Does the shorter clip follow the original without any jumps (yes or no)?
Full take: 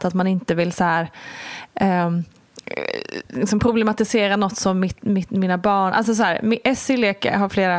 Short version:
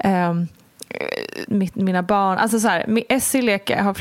no